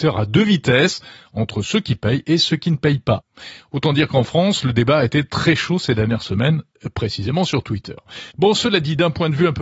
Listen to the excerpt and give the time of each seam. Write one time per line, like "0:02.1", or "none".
0:08.3

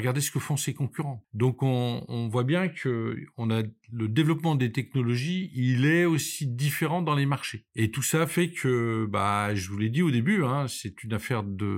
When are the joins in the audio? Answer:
0:02.1

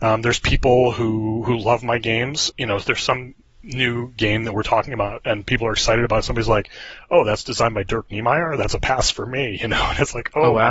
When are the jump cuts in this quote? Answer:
0:02.5

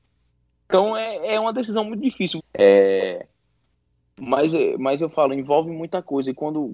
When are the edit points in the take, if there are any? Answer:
0:02.4

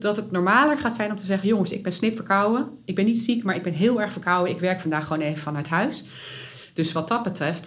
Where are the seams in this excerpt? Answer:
none

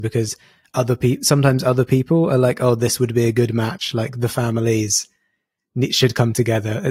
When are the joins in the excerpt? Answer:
none

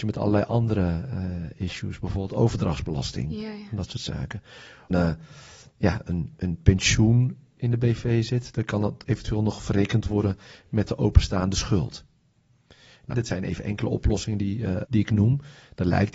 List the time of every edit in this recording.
0:04.9
0:13.1
0:14.8

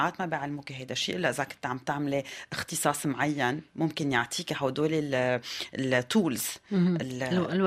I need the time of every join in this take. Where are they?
none

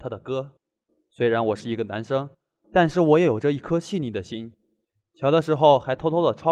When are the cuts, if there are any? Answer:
none

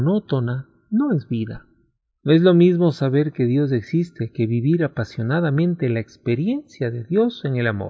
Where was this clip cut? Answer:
none

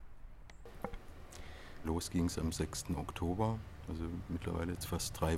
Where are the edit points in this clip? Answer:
0:01.8

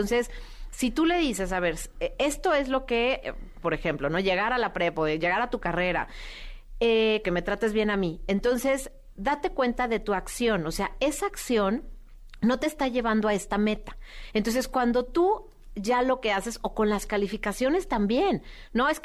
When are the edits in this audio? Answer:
0:03.6
0:07.2

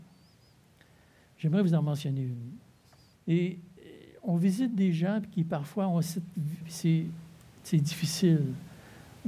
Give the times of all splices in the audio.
0:03.2
0:06.6

